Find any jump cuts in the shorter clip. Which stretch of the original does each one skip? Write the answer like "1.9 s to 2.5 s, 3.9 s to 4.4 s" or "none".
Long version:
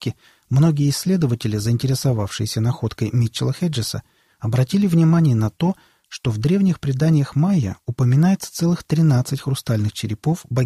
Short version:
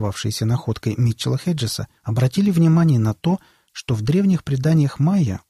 4.1 s to 4.3 s